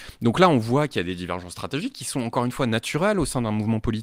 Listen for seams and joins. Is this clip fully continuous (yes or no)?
yes